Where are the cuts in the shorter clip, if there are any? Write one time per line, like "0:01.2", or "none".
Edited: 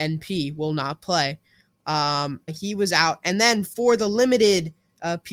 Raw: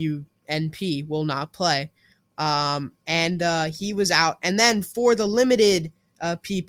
0:02.5